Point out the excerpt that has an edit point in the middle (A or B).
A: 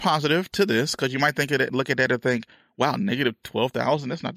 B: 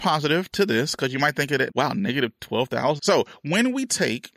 B